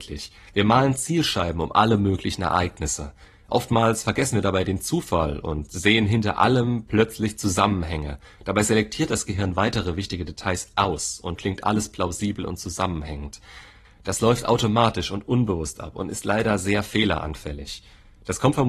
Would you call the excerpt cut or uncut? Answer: cut